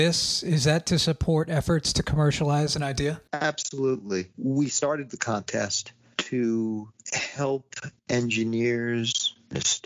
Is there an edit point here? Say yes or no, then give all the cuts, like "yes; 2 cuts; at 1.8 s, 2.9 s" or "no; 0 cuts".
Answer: yes; 2 cuts; at 3.3 s, 8.0 s